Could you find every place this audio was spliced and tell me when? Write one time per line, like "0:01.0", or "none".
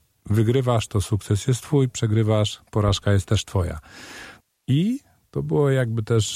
0:04.5